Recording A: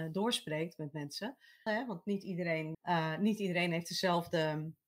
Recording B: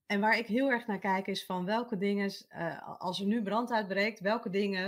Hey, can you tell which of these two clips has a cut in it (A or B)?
A